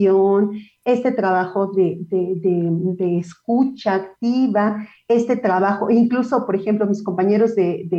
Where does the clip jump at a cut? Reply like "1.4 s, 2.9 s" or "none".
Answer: none